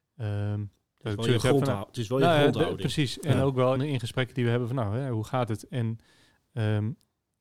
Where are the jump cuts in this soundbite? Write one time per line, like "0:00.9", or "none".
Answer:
0:03.8